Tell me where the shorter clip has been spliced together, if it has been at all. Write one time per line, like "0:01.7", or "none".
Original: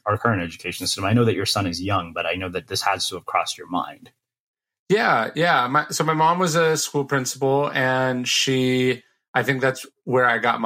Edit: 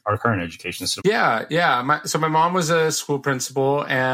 0:01.0